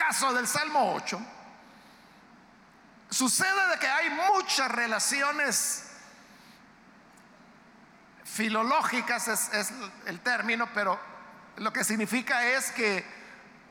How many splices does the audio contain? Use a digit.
0